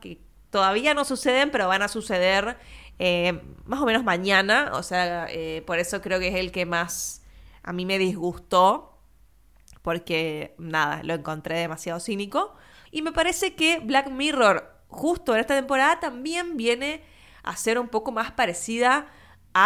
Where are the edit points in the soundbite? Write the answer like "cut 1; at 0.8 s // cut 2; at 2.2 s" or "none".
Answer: cut 1; at 12.9 s